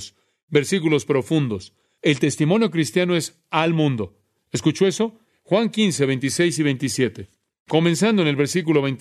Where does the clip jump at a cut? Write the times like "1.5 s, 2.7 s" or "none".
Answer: 2.0 s, 5.3 s